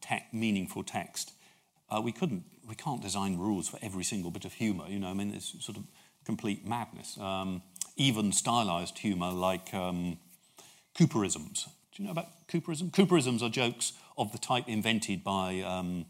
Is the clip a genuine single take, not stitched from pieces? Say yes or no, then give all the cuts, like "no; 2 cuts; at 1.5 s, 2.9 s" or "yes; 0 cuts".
no; 2 cuts; at 1.8 s, 11.8 s